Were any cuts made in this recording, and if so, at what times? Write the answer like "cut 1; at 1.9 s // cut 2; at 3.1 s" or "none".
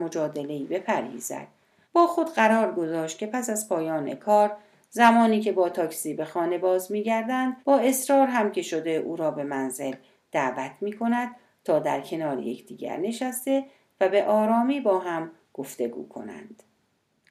cut 1; at 1.8 s // cut 2; at 7.6 s